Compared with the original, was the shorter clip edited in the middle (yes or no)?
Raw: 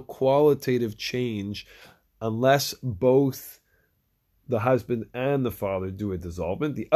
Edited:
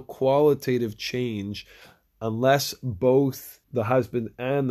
yes